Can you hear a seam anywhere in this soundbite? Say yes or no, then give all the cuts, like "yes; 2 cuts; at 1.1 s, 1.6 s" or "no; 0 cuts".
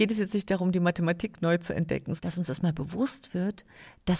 yes; 1 cut; at 2.2 s